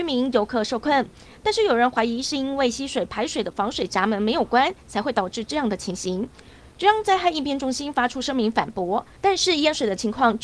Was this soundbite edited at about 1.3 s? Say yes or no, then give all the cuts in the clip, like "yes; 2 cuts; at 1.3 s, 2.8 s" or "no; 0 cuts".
no; 0 cuts